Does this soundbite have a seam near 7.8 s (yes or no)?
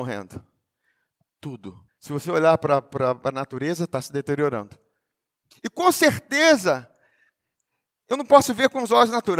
no